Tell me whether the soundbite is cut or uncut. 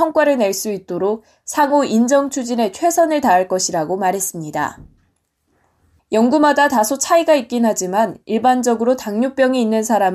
cut